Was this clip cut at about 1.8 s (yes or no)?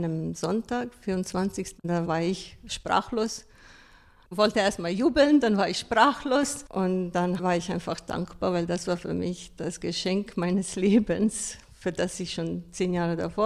yes